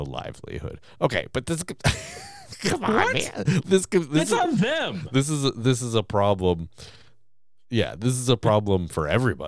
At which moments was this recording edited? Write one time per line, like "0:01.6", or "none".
0:03.6

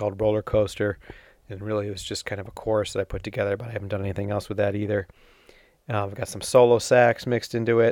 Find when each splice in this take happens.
none

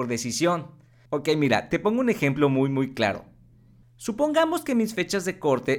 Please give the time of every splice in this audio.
none

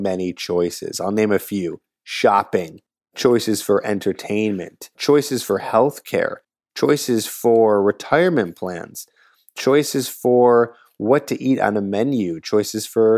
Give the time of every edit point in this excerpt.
none

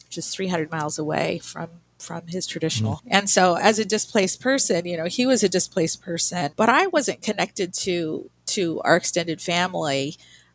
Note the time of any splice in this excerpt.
0:03.0
0:06.5

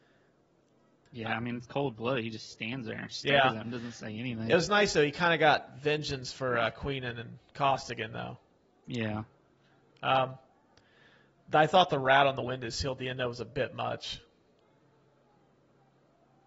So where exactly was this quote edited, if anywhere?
none

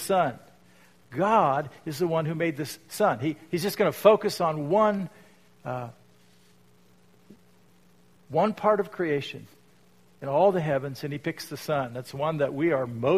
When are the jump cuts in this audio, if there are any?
none

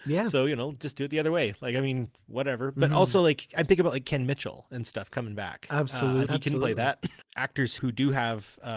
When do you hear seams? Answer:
0:06.3
0:07.8

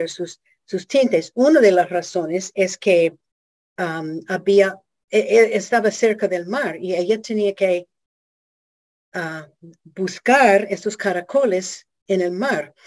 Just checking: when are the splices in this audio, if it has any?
none

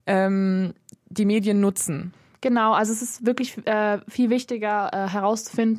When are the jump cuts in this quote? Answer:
none

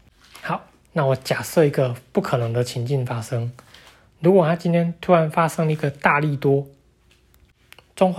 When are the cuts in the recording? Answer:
none

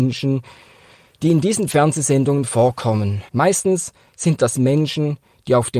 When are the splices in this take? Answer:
0:03.3

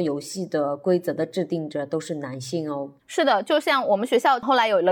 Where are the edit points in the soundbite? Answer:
0:03.0

